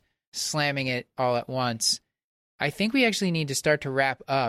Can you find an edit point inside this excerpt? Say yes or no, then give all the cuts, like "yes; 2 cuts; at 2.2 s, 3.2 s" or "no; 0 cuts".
no; 0 cuts